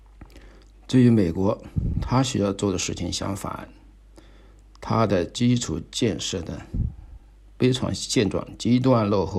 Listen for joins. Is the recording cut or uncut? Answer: uncut